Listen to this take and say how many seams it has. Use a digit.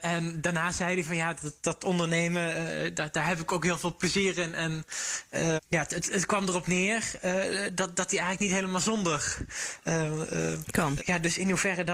2